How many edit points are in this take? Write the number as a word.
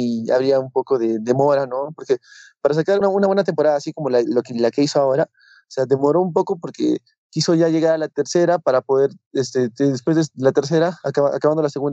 one